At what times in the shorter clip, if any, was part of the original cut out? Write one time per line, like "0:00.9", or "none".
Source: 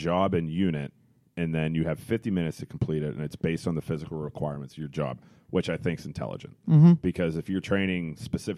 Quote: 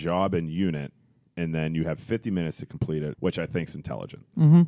0:03.1